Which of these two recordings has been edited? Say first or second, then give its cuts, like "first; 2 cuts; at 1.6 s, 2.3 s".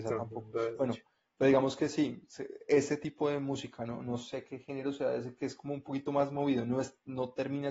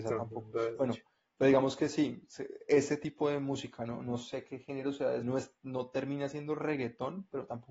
second; 1 cut; at 5.2 s